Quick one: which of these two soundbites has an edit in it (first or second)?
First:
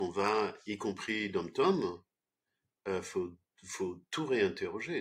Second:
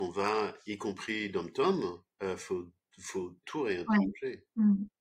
second